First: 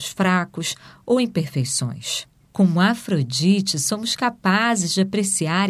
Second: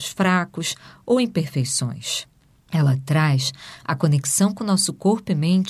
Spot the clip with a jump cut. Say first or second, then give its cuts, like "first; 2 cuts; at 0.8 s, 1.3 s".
first; 1 cut; at 2.4 s